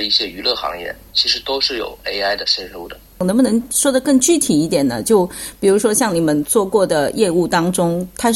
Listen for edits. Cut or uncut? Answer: uncut